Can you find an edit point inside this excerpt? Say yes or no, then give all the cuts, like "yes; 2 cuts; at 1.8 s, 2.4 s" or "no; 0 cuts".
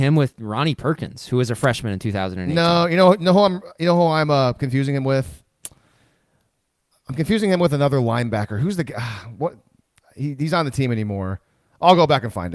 no; 0 cuts